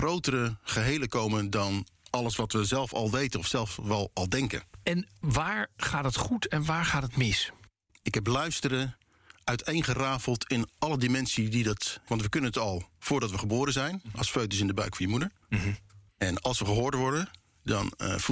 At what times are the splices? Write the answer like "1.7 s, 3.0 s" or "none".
12.1 s, 15.4 s